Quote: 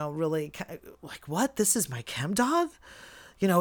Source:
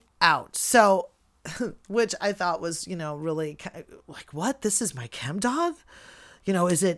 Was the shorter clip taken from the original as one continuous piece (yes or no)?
yes